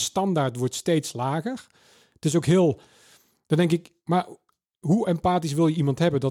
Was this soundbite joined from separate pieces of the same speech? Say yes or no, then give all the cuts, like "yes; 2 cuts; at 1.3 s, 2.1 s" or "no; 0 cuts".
no; 0 cuts